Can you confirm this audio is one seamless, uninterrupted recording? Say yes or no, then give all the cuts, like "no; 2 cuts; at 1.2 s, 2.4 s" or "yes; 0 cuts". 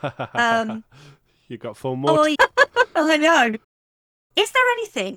no; 1 cut; at 2.3 s